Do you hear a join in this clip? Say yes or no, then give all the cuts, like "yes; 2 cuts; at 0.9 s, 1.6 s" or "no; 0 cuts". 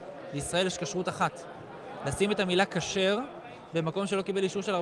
no; 0 cuts